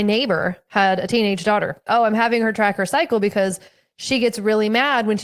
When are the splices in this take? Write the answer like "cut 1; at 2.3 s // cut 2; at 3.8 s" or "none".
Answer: cut 1; at 1.9 s